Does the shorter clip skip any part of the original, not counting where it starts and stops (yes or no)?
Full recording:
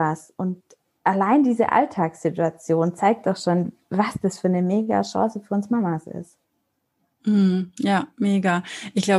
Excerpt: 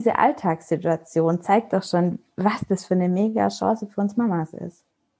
no